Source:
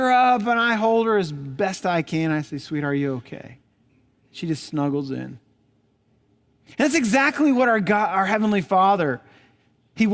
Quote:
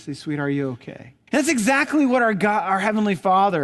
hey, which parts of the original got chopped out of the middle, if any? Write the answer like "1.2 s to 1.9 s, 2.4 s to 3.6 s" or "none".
3.7 s to 6.7 s